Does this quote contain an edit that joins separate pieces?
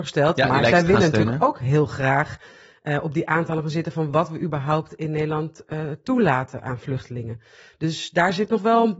no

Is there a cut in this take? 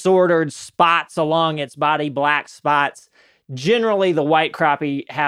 no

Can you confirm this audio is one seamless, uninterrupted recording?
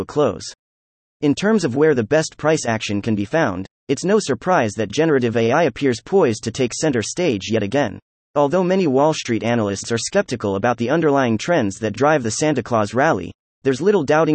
no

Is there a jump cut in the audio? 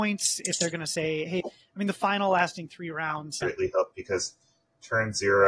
yes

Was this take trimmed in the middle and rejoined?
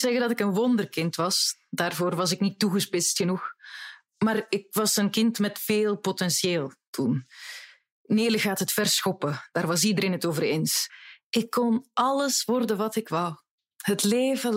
no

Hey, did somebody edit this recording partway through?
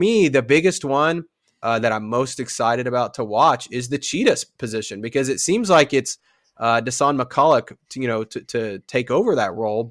no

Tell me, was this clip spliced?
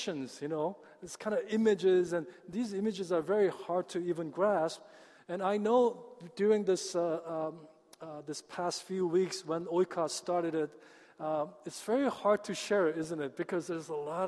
yes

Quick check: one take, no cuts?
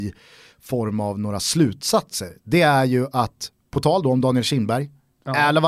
yes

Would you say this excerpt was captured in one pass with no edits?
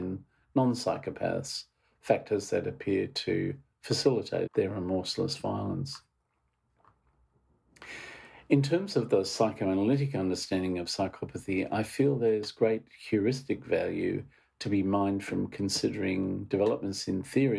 no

